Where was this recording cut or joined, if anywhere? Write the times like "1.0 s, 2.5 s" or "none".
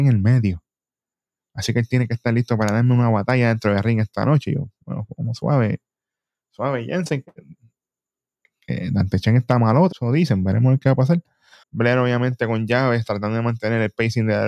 9.9 s, 11.6 s